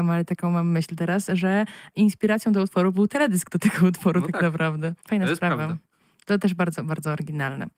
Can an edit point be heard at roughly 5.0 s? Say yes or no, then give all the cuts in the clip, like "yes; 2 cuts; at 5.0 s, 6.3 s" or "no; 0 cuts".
yes; 1 cut; at 5.0 s